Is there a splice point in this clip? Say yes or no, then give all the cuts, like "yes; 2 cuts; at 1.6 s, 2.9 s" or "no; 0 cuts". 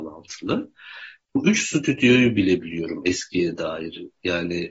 yes; 1 cut; at 1.3 s